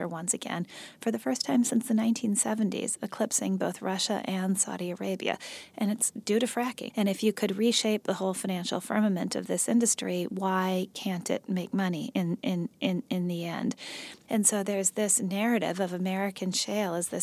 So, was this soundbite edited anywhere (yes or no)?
yes